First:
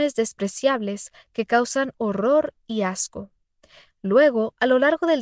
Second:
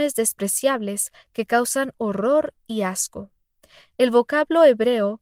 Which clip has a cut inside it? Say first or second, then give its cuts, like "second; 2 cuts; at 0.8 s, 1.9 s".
first; 1 cut; at 3.9 s